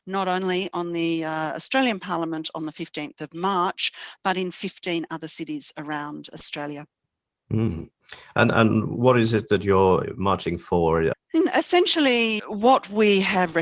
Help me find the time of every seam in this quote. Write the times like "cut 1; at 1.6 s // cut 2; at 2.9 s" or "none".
cut 1; at 11.1 s // cut 2; at 12.4 s